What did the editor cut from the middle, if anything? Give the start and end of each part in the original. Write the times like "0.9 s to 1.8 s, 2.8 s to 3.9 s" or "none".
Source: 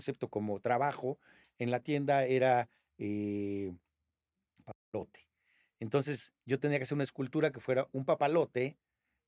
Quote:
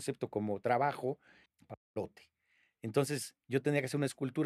1.5 s to 4.4 s